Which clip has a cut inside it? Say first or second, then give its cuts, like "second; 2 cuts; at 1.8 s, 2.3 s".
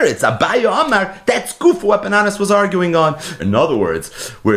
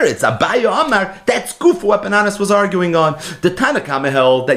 first; 1 cut; at 3.4 s